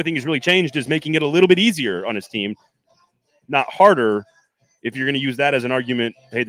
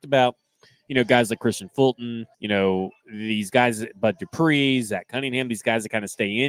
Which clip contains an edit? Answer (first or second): second